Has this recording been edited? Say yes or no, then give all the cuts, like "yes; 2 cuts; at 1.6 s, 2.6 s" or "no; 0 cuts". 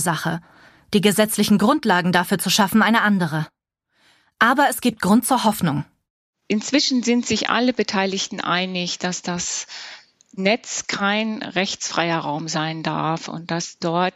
no; 0 cuts